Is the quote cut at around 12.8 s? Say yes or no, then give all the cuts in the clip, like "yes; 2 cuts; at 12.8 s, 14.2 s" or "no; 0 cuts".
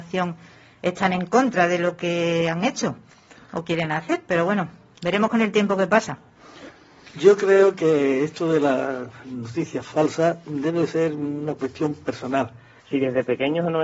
yes; 1 cut; at 12.8 s